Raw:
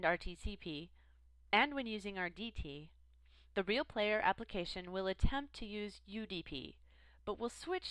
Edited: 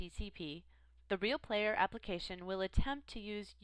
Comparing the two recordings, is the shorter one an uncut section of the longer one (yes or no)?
no